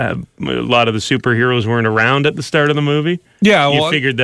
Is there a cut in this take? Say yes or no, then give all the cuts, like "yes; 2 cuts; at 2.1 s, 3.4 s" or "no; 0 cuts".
no; 0 cuts